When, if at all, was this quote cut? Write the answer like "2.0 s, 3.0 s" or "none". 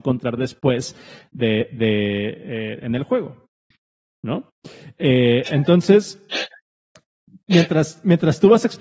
4.1 s